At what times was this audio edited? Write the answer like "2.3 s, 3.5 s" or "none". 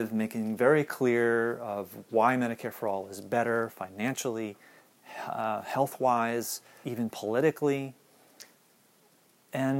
6.8 s